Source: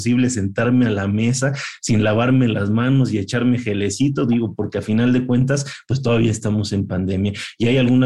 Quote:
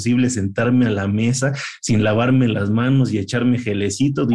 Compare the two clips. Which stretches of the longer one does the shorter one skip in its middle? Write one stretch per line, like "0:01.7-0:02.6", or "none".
none